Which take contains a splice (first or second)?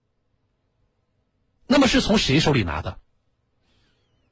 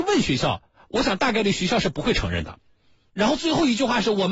second